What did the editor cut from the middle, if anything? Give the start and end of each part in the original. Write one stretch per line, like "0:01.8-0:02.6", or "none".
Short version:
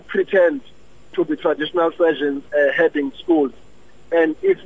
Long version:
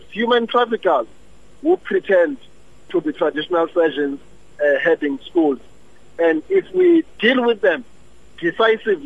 0:04.2-0:04.5